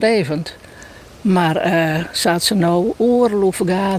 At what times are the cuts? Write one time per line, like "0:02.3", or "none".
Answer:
none